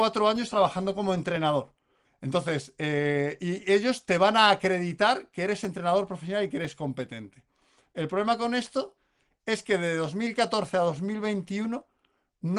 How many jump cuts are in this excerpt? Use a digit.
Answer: 1